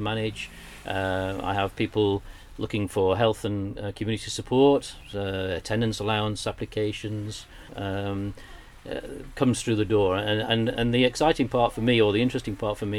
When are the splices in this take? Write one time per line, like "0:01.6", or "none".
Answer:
0:07.7
0:10.7